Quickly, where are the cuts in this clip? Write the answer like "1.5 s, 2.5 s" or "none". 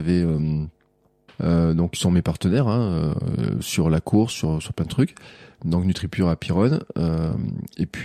1.3 s